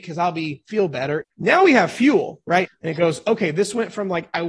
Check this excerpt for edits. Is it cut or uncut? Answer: cut